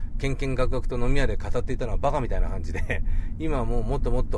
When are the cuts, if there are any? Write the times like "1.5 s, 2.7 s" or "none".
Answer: none